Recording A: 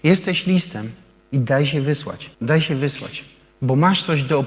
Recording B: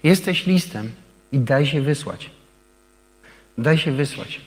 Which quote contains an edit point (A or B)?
A